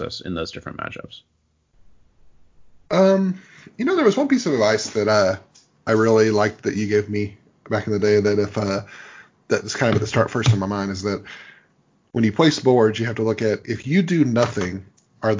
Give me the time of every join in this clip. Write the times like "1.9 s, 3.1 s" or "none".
none